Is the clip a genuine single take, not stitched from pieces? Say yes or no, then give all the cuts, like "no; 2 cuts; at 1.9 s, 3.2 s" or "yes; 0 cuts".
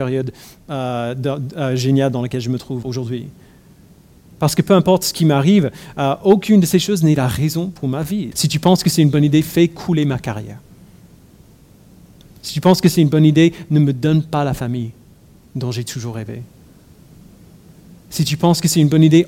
no; 2 cuts; at 2.8 s, 8.3 s